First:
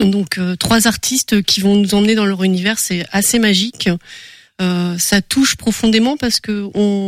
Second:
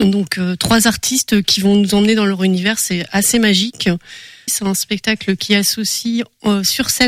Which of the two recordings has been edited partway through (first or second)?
second